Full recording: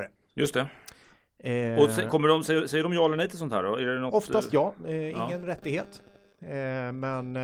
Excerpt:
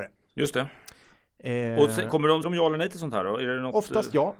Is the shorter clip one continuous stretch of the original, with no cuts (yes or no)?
no